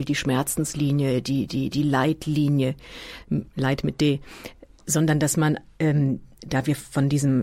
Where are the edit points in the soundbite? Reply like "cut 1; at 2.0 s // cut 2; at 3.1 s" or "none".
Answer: none